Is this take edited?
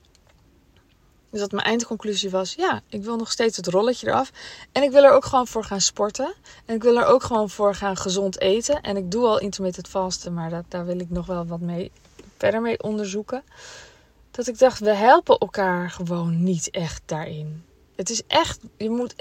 no; 0 cuts

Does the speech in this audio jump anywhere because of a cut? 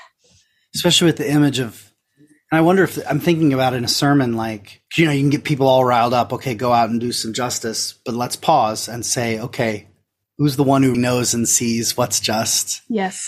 yes; 2 cuts; at 4.9 s, 10.9 s

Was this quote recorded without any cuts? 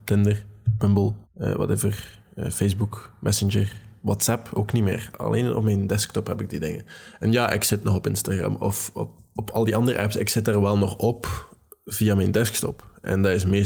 no; 1 cut; at 1.2 s

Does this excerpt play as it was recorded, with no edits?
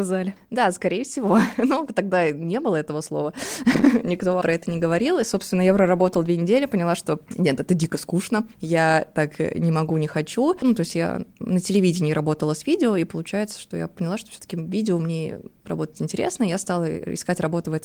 no; 1 cut; at 10.6 s

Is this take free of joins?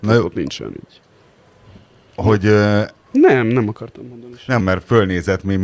no; 2 cuts; at 3.1 s, 4.6 s

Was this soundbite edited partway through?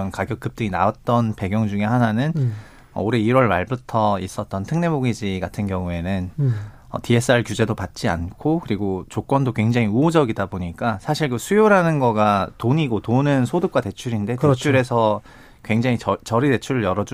no; 0 cuts

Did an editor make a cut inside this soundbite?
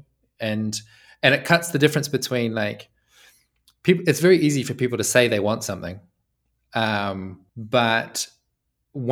yes; 1 cut; at 7.5 s

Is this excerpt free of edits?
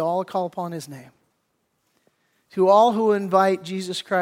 yes; 0 cuts

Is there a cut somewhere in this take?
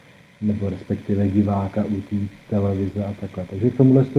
no; 0 cuts

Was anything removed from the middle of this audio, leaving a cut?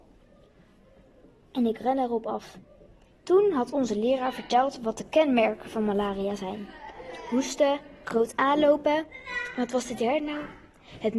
yes; 1 cut; at 3.1 s

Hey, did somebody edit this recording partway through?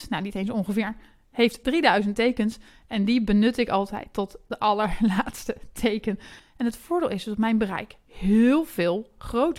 yes; 1 cut; at 6.4 s

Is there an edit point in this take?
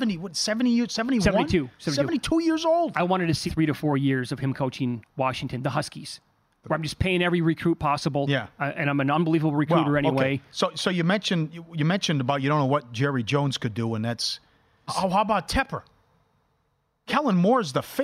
yes; 3 cuts; at 3.5 s, 6.6 s, 14.9 s

